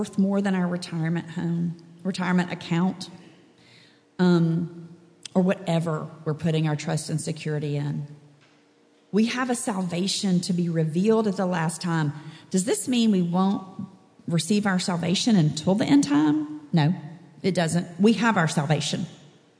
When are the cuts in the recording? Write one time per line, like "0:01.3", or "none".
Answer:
none

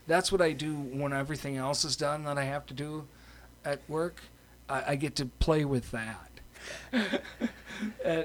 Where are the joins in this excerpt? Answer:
0:06.6

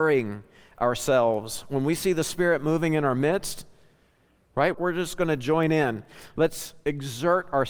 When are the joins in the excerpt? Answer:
0:04.7

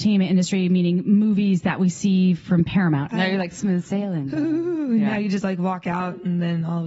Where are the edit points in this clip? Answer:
0:03.1

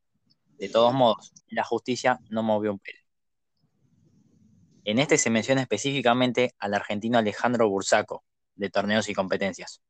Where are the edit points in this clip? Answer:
0:01.4
0:04.7

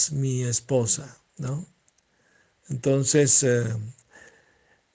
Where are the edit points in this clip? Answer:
none

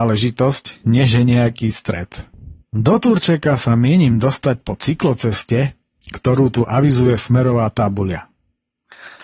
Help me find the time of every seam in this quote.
0:02.6

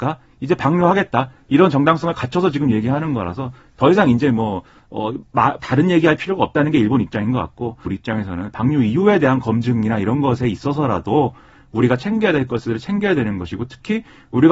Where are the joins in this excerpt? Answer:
0:05.6
0:07.9

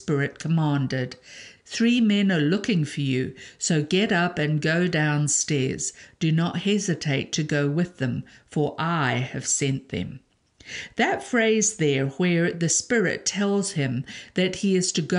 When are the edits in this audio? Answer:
0:01.6

